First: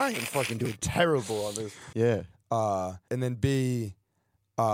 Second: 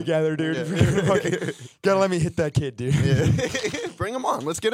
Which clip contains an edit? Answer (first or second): first